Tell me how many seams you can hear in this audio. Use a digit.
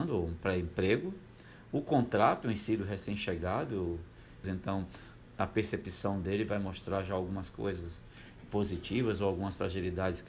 1